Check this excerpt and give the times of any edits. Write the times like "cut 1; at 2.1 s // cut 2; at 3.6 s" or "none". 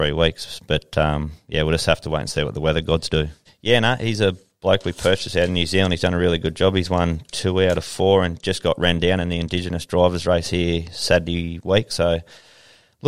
cut 1; at 3.5 s